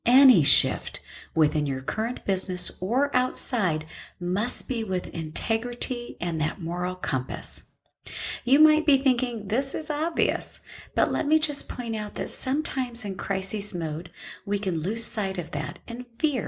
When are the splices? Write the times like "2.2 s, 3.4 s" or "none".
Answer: none